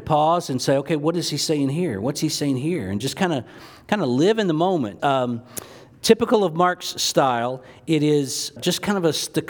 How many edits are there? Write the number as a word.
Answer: two